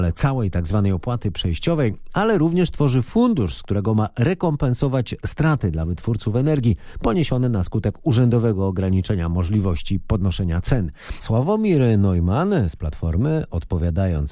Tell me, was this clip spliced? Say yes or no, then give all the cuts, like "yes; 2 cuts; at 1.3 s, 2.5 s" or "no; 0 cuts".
yes; 1 cut; at 11.2 s